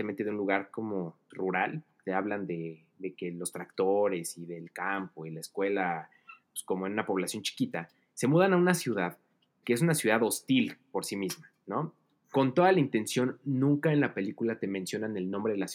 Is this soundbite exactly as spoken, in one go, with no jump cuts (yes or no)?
no